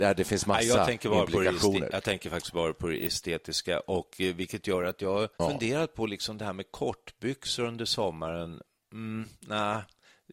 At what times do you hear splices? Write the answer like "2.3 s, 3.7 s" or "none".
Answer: 5.3 s